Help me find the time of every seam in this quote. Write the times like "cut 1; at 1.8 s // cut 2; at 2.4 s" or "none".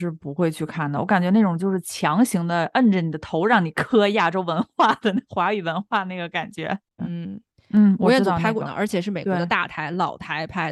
cut 1; at 7.0 s // cut 2; at 8.6 s

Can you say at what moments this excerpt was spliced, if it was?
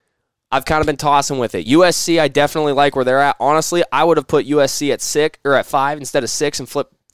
none

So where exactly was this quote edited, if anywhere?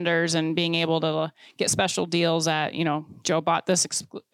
none

